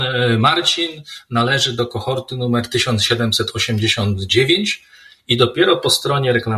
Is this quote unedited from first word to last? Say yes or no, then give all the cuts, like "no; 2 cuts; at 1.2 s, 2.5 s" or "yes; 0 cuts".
yes; 0 cuts